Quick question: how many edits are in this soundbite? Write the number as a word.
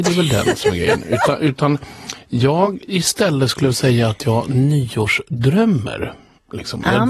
zero